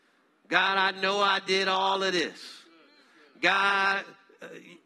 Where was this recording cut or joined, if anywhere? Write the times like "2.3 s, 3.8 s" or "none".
none